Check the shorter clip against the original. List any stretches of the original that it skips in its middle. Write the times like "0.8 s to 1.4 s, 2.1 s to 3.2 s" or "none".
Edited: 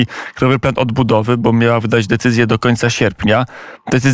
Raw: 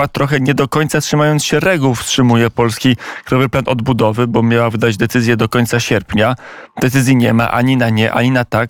none